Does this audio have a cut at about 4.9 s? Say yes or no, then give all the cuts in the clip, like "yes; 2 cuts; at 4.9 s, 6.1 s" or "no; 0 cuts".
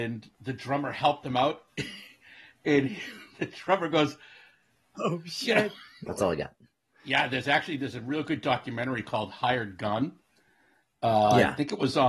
yes; 2 cuts; at 4.9 s, 6.1 s